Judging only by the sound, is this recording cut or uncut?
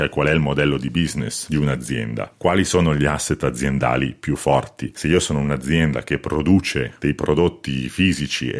cut